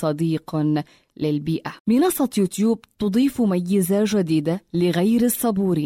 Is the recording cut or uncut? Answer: cut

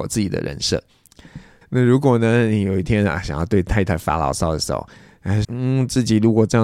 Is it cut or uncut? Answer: cut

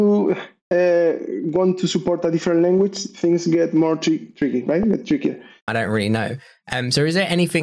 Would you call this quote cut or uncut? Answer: cut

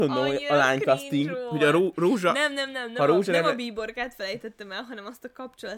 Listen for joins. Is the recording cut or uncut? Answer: uncut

